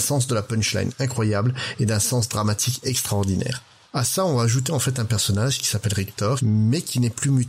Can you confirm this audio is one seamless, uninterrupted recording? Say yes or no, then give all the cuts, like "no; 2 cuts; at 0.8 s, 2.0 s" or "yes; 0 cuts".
no; 2 cuts; at 3.8 s, 6.4 s